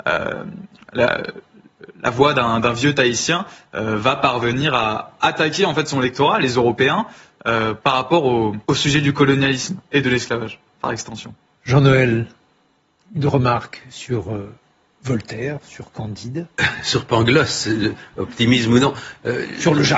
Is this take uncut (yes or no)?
no